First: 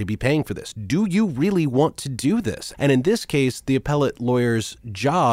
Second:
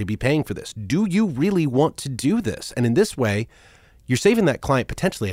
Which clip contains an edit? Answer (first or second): first